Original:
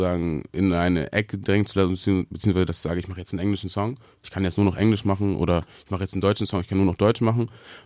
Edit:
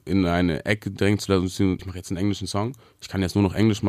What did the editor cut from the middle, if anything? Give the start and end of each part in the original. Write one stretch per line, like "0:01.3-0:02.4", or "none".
0:02.3-0:03.0